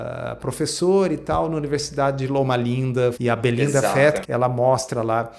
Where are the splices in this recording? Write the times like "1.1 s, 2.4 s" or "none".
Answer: 3.1 s, 4.2 s